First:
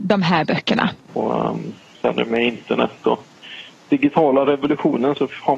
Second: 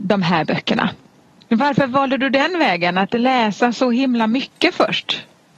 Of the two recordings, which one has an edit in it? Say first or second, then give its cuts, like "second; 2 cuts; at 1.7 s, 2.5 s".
first; 1 cut; at 1.1 s